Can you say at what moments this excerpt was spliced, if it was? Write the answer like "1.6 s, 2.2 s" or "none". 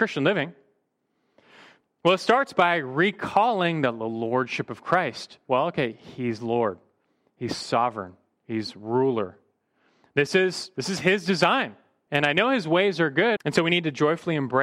12.1 s, 13.4 s